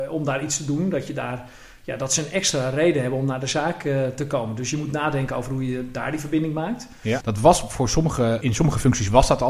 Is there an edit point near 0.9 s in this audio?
no; 2 cuts; at 7.2 s, 8.4 s

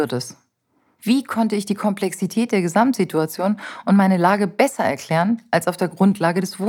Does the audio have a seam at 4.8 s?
no; 1 cut; at 1.0 s

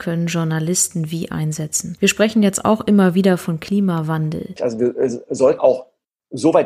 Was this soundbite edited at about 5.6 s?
yes; 2 cuts; at 4.6 s, 5.6 s

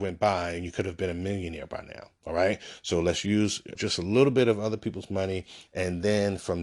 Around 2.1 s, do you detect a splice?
no; 2 cuts; at 3.8 s, 5.7 s

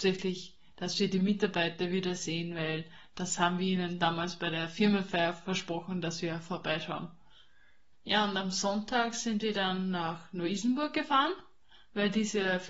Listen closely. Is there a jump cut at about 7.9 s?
yes; 1 cut; at 7.9 s

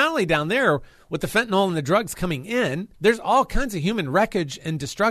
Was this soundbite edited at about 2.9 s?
yes; 1 cut; at 2.9 s

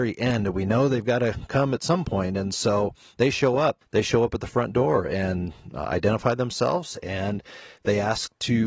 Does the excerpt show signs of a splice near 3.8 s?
yes; 1 cut; at 3.8 s

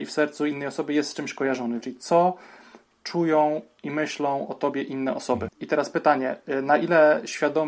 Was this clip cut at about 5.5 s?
yes; 2 cuts; at 1.8 s, 5.5 s

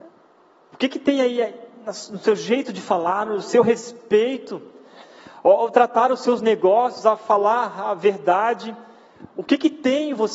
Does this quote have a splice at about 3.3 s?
yes; 1 cut; at 3.3 s

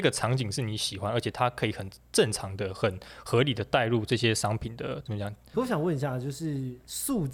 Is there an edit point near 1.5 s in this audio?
no; 1 cut; at 5.5 s

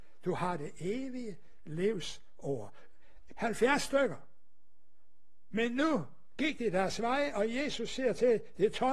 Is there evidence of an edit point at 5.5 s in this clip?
yes; 2 cuts; at 3.3 s, 5.5 s

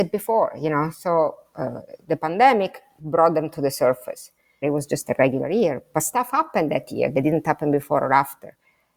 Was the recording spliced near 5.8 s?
no; 1 cut; at 4.6 s

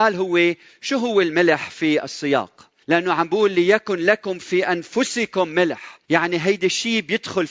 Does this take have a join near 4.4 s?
no; 2 cuts; at 2.8 s, 6.0 s

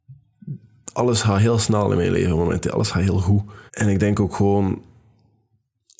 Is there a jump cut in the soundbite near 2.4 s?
no; 1 cut; at 3.7 s

